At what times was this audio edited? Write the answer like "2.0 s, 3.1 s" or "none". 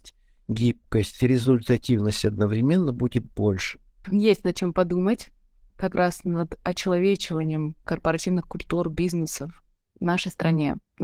4.0 s